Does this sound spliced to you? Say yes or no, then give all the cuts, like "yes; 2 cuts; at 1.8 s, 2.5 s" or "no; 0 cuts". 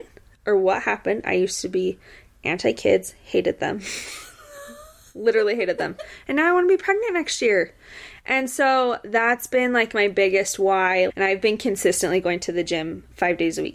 yes; 1 cut; at 11.1 s